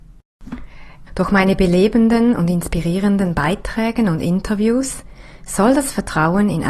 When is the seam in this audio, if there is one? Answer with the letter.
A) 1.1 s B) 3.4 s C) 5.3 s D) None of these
A